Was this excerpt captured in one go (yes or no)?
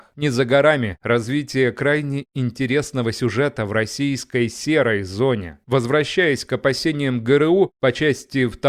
yes